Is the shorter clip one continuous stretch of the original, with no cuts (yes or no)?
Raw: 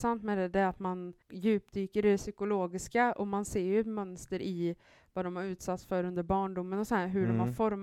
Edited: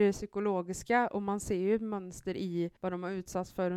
no